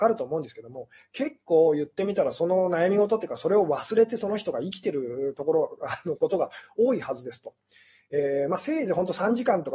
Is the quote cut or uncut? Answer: uncut